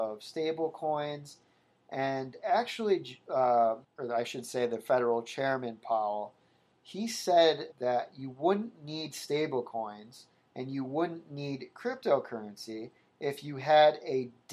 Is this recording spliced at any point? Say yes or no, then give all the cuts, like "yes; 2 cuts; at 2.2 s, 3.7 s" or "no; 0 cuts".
yes; 2 cuts; at 3.8 s, 7.7 s